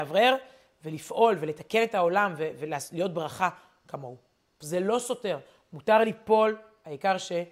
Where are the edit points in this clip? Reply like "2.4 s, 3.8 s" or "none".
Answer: 4.6 s